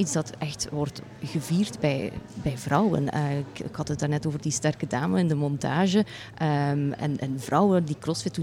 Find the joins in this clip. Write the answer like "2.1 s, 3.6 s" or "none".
none

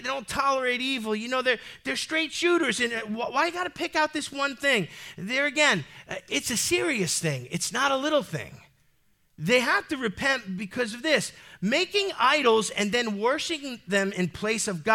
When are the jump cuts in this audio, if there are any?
none

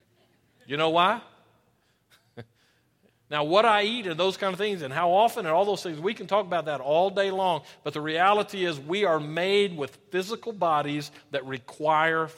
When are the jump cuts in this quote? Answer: 3.1 s

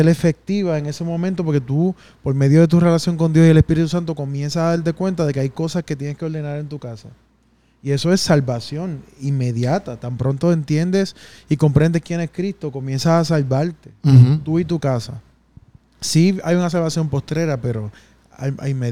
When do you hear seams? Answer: none

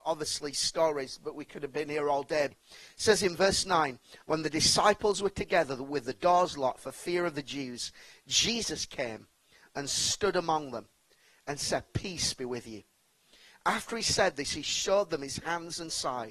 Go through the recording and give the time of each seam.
2.5 s, 4.2 s

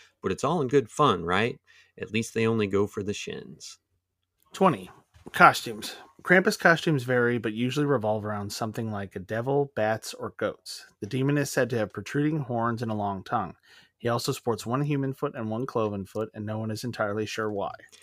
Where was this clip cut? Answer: none

